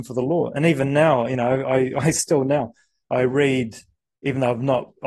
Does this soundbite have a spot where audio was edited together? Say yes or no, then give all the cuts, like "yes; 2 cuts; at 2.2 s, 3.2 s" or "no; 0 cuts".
no; 0 cuts